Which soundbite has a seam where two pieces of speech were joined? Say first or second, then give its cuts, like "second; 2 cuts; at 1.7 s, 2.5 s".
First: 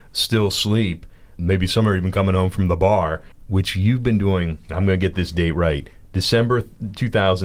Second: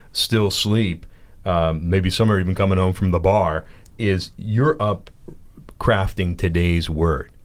first; 2 cuts; at 1.4 s, 3.3 s